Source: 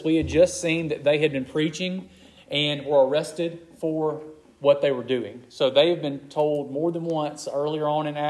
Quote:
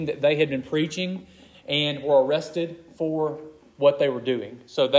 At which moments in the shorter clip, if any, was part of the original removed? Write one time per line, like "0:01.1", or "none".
none